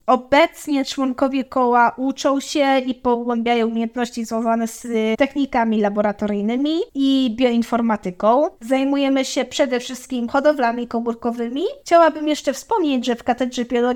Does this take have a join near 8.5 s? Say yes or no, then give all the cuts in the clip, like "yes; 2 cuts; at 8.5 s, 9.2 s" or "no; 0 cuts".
no; 1 cut; at 13.0 s